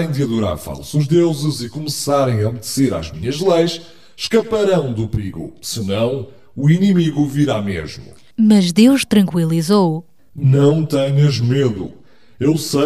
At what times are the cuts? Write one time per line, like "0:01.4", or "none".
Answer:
0:08.3